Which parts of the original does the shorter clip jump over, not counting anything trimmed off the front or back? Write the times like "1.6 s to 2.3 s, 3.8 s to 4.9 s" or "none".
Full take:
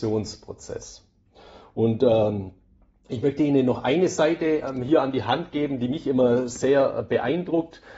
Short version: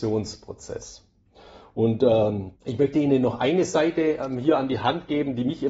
2.6 s to 3.0 s